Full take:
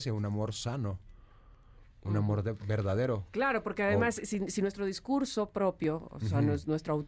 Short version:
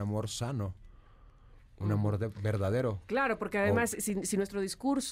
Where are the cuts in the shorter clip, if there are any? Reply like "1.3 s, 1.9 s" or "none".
none